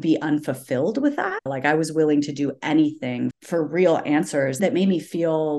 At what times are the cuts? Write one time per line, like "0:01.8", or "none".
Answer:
0:01.5
0:03.3